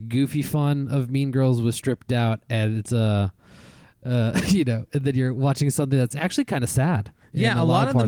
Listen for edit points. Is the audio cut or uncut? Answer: uncut